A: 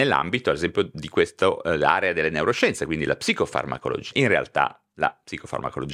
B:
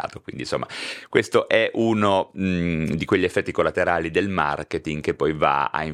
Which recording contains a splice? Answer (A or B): A